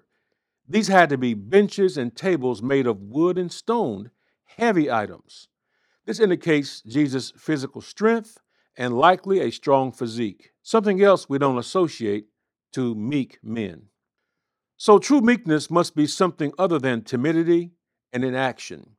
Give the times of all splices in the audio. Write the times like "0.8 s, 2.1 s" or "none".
10.6 s